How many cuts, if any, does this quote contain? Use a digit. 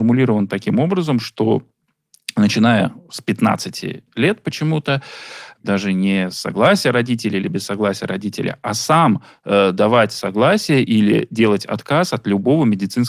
1